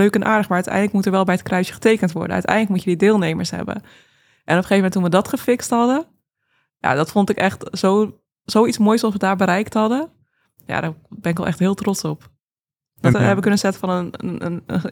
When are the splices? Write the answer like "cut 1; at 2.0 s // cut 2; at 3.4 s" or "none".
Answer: cut 1; at 13.1 s

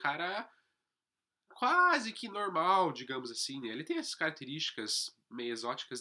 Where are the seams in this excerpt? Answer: none

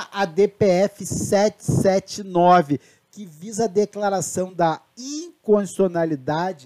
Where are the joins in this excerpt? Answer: none

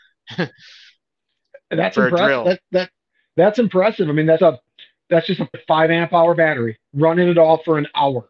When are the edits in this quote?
cut 1; at 4.4 s // cut 2; at 5.5 s

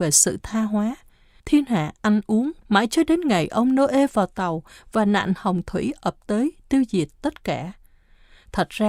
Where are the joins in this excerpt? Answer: cut 1; at 1.4 s // cut 2; at 2.6 s

